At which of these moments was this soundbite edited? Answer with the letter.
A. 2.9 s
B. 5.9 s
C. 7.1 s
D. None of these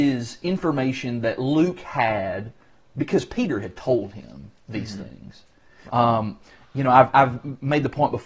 B